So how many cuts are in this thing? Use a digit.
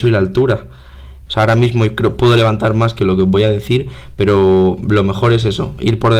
1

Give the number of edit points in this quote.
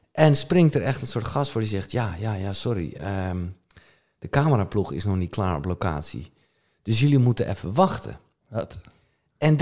0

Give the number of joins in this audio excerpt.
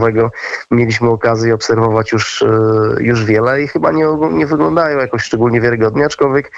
0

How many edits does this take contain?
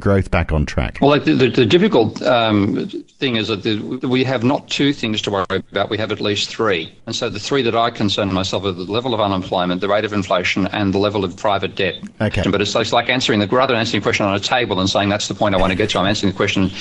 2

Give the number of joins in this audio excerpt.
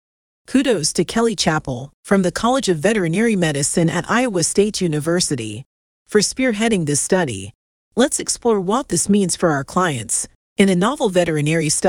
0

